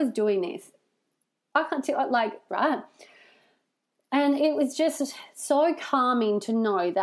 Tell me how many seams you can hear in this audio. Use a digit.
1